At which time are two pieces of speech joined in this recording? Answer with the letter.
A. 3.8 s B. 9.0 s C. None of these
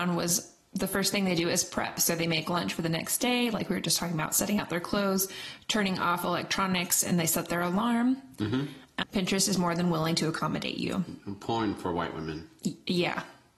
B